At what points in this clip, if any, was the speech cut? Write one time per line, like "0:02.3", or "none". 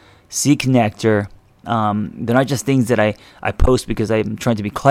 0:01.6